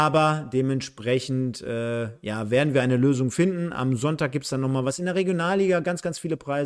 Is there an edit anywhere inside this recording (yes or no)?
no